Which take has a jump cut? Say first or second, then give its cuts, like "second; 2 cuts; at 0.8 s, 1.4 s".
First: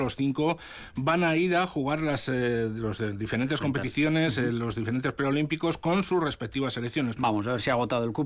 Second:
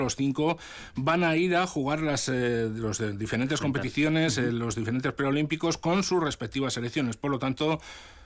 first; 1 cut; at 7.2 s